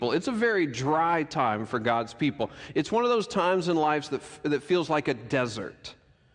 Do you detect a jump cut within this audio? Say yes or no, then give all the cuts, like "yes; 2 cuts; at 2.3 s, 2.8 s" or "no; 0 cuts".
no; 0 cuts